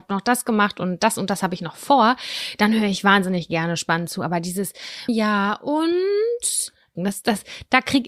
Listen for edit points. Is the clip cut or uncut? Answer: cut